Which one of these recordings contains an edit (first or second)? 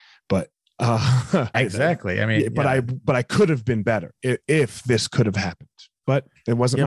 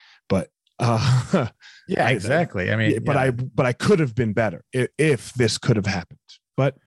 first